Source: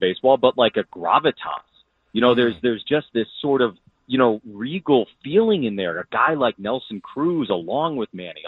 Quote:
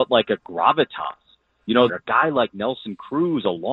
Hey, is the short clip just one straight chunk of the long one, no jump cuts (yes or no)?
no